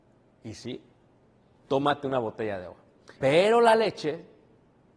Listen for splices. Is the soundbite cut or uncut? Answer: cut